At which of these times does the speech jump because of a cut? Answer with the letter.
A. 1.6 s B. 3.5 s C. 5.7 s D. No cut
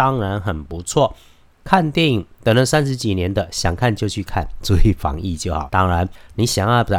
C